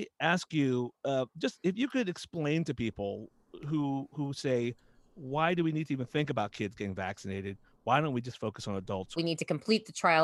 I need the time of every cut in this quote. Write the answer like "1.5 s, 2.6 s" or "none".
9.2 s